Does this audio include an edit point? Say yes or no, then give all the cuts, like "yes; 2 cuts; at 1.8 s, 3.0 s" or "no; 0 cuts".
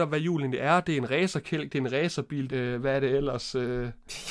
yes; 1 cut; at 2.5 s